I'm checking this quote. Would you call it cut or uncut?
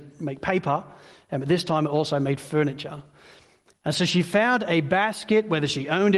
uncut